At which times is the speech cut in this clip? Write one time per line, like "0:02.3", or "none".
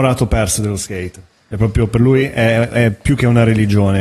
none